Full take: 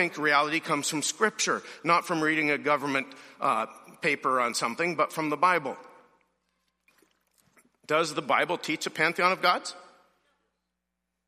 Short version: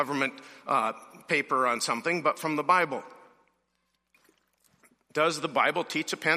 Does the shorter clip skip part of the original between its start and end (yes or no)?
no